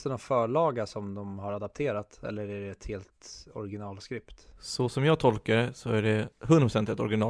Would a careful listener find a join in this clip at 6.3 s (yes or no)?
yes